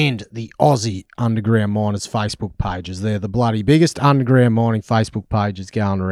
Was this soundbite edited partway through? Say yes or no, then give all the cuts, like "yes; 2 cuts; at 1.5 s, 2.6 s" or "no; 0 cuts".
no; 0 cuts